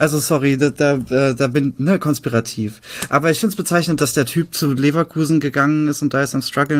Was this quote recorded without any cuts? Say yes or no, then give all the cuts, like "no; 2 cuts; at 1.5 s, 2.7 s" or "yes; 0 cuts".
yes; 0 cuts